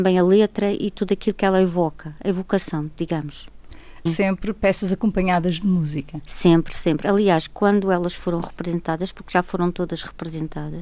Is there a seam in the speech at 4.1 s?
yes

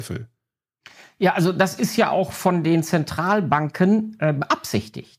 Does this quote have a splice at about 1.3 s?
no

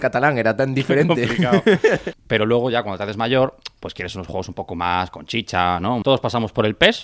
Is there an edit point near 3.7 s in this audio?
no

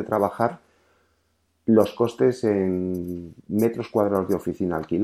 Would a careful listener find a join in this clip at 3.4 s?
yes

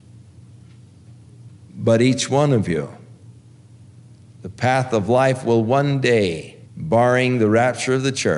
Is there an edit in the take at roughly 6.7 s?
yes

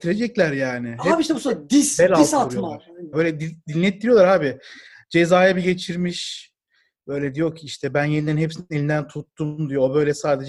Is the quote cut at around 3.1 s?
yes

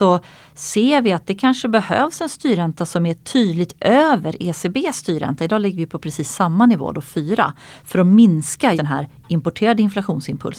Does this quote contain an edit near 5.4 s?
no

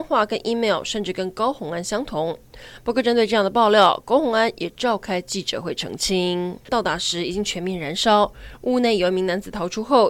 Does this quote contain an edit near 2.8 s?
no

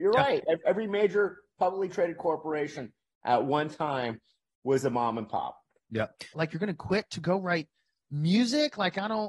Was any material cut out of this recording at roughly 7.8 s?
no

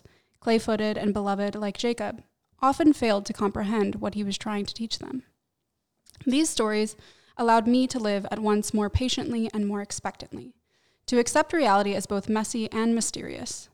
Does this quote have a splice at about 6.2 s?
no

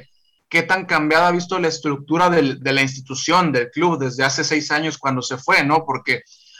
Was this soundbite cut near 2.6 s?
yes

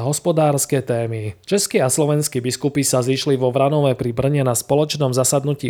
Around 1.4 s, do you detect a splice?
yes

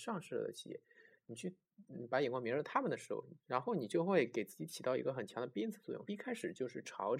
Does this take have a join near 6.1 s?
yes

